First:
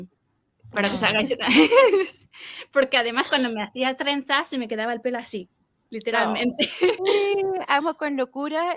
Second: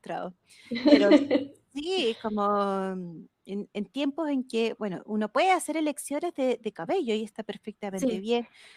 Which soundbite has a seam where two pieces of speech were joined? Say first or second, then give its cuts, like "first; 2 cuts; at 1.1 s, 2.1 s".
first; 1 cut; at 7.0 s